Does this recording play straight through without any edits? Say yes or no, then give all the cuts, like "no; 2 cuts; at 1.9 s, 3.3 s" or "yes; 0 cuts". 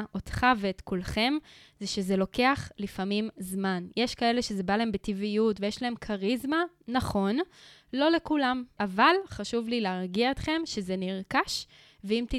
yes; 0 cuts